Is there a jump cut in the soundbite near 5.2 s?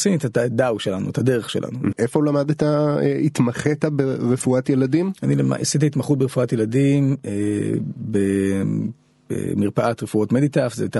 no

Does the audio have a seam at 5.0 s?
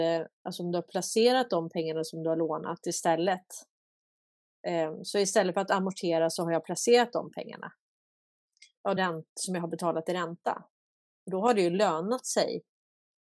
no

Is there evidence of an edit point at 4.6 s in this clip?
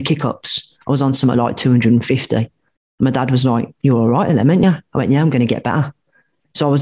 no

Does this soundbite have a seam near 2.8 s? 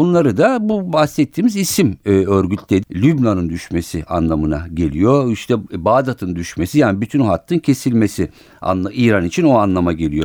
yes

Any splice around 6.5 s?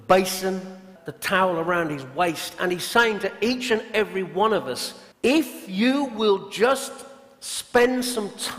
no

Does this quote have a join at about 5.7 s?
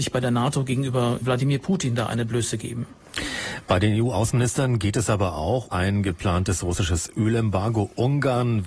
yes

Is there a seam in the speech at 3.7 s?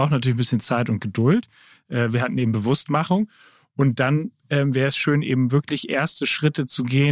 no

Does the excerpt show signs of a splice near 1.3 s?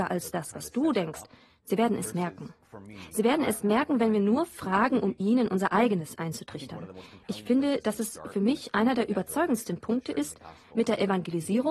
no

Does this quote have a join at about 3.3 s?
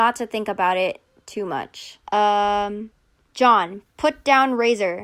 no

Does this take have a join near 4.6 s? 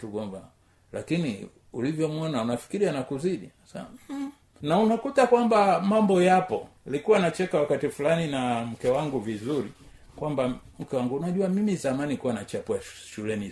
yes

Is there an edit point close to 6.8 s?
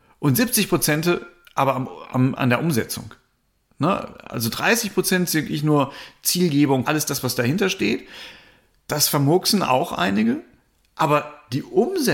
yes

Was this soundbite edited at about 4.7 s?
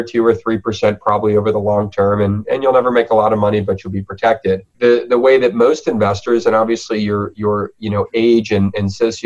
yes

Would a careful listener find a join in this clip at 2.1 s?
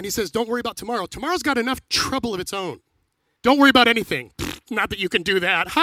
no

